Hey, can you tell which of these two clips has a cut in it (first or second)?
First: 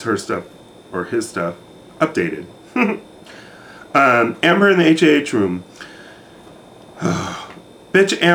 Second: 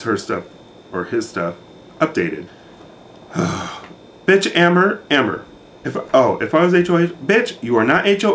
second